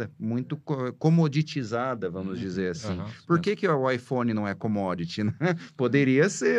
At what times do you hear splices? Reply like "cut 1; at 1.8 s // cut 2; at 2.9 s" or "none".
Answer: none